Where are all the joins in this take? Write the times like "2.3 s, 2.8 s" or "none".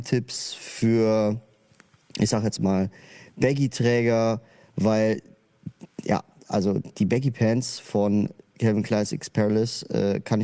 none